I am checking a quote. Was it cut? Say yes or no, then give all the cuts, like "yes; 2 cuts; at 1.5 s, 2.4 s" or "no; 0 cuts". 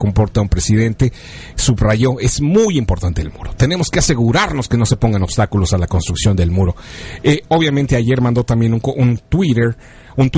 no; 0 cuts